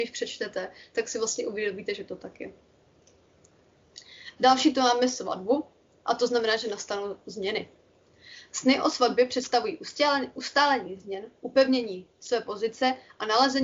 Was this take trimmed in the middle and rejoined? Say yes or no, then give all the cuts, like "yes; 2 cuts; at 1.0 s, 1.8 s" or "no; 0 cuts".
no; 0 cuts